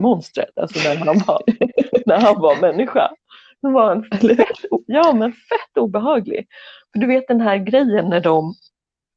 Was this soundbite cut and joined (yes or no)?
no